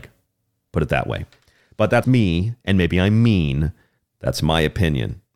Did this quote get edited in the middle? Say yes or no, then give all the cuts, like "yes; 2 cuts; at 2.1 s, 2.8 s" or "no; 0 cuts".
yes; 2 cuts; at 2.0 s, 4.0 s